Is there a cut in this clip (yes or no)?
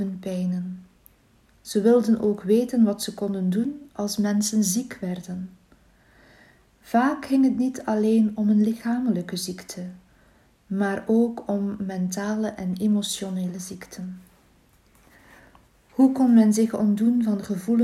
no